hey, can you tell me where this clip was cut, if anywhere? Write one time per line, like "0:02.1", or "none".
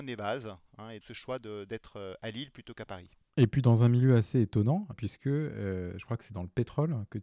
0:01.0
0:04.9